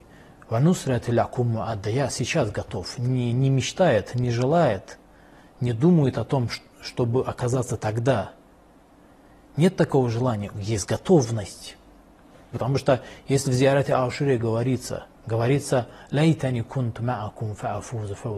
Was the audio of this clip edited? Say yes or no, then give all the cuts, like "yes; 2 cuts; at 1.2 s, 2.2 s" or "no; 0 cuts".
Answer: yes; 2 cuts; at 12.5 s, 15.2 s